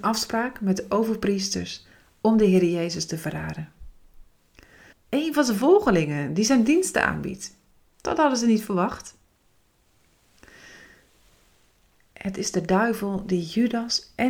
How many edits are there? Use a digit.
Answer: 1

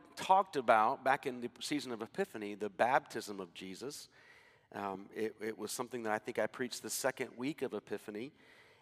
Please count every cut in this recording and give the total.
0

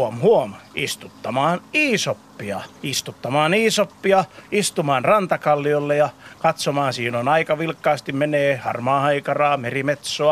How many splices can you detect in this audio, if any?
1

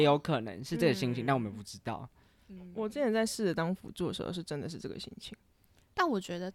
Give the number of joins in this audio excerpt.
0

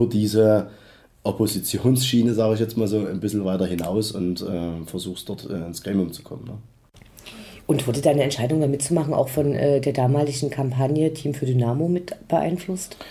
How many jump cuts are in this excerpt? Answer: 0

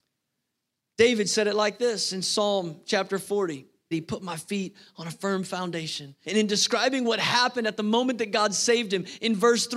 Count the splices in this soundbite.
2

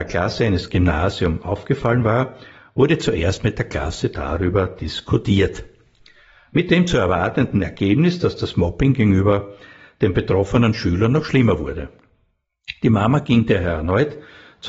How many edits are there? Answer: 0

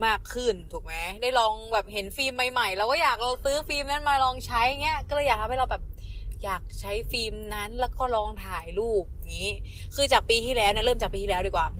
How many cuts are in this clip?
0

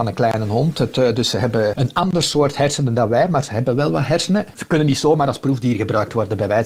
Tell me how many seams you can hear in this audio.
2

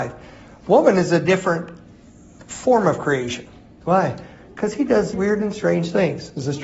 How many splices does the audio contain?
2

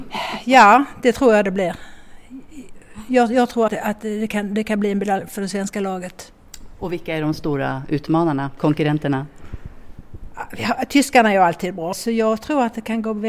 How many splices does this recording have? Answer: 2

